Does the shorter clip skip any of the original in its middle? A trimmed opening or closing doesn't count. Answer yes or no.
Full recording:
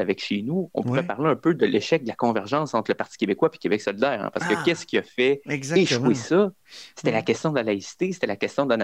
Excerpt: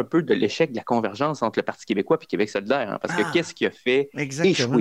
no